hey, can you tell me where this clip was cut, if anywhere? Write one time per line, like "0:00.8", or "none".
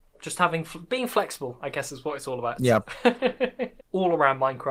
0:02.6
0:03.8